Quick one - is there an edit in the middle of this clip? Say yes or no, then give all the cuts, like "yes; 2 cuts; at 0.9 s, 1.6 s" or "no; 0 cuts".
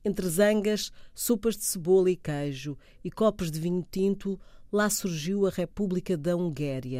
no; 0 cuts